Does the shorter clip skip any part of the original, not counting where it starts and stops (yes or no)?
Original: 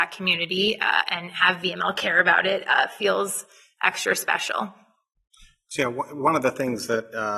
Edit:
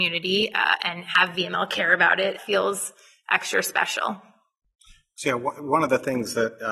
yes